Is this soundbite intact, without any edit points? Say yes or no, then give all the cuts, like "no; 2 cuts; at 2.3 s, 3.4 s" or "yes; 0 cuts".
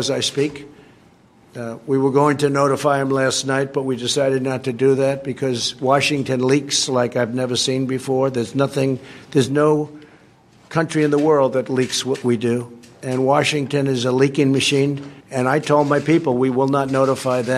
no; 2 cuts; at 12.2 s, 15.2 s